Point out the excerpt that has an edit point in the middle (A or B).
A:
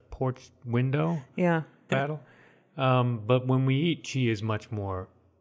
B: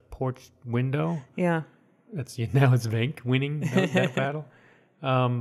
A